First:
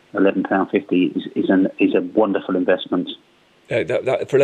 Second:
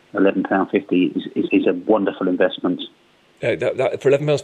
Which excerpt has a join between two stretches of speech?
second; 1 cut; at 1.5 s

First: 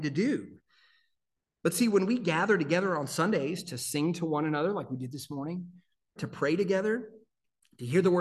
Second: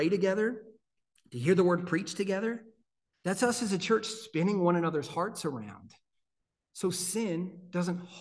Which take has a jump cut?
first; 1 cut; at 6.2 s

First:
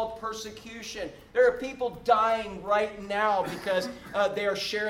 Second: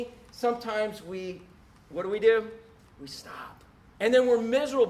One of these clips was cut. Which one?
second; 1 cut; at 3.9 s

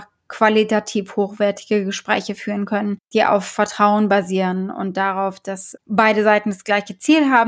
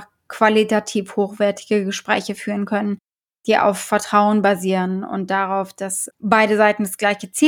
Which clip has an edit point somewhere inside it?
first; 1 cut; at 3.0 s

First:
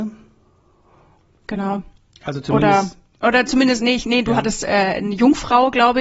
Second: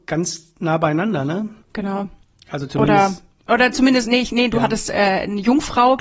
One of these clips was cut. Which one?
second; 1 cut; at 1.6 s

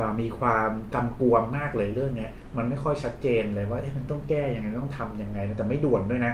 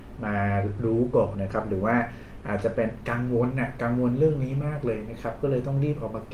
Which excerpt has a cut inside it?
second; 1 cut; at 1.3 s

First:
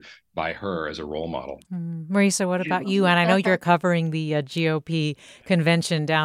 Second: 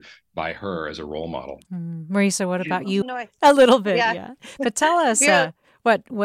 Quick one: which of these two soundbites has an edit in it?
second; 1 cut; at 3.0 s

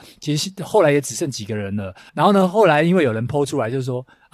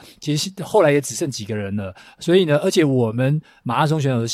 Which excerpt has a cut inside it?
first; 1 cut; at 2.1 s

